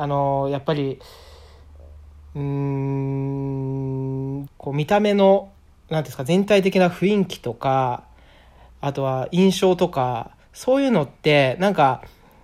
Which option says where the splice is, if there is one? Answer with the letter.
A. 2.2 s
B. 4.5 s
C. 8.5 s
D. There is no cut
B